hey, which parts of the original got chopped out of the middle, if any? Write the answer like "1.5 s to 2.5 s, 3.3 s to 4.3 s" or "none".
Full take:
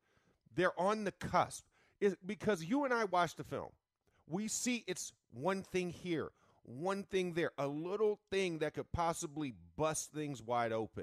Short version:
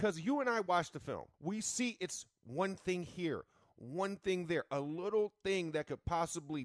3.8 s to 4.2 s